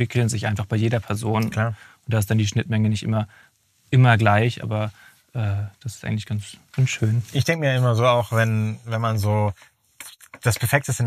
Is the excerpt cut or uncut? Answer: uncut